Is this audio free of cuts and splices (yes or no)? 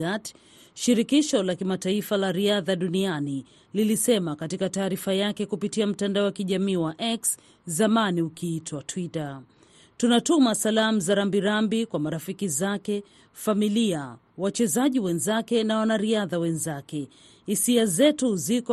yes